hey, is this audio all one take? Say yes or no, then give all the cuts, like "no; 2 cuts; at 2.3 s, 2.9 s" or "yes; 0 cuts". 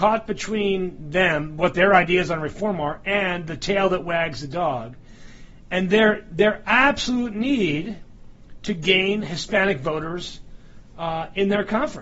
yes; 0 cuts